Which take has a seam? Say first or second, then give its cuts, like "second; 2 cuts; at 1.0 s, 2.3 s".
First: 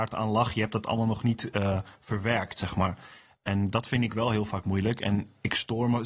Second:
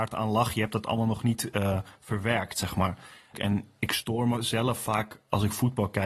second; 1 cut; at 3.3 s